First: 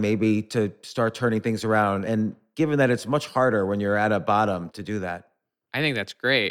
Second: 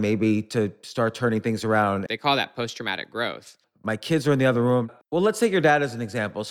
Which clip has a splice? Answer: second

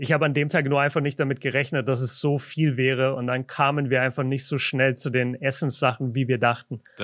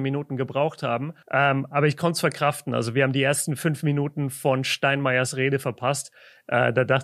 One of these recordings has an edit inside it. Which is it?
second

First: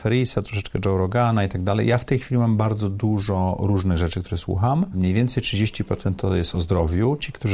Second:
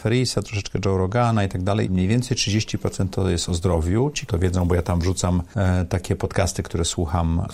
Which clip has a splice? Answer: second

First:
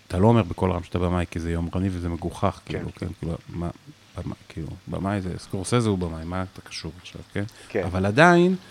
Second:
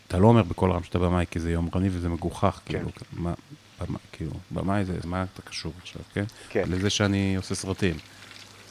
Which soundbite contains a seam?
second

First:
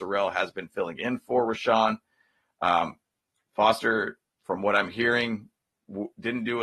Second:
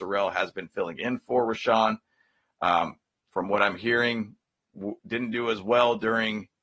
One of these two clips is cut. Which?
second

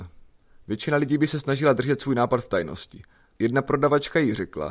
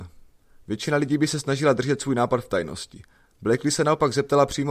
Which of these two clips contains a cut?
first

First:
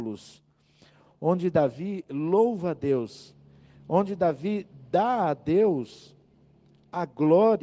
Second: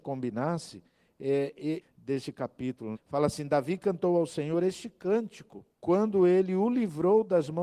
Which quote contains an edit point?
second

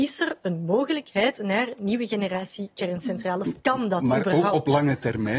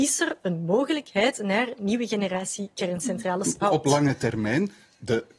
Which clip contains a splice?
second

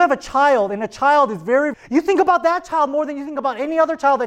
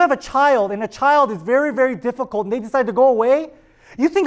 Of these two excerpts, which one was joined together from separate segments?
first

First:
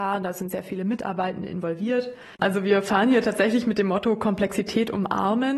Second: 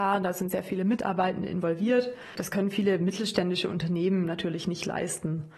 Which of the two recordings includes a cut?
first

